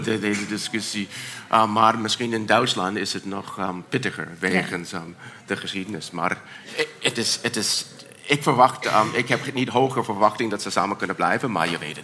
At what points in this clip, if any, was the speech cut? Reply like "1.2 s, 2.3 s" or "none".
none